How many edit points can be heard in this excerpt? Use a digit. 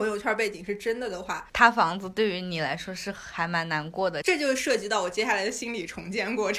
1